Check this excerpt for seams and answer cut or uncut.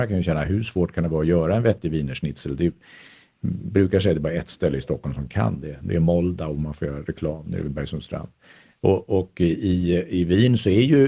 uncut